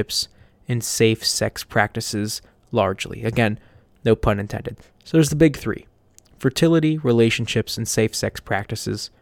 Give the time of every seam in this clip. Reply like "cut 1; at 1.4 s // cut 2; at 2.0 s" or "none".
none